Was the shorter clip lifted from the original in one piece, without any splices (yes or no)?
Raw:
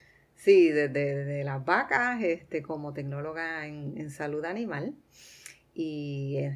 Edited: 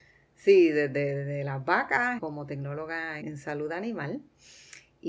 no